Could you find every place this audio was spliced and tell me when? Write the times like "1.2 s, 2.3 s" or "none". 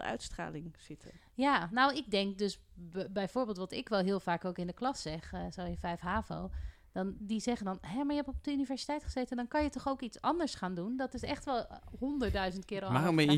none